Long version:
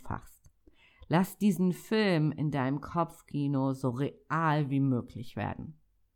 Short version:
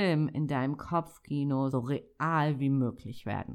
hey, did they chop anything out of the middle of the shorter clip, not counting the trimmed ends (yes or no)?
yes